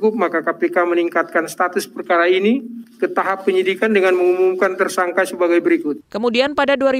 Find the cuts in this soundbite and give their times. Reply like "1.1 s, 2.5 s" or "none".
6.0 s